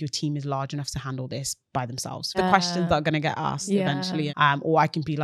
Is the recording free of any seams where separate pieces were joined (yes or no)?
no